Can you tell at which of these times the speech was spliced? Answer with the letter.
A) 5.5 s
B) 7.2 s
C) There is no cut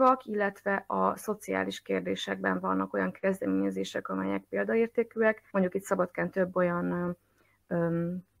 A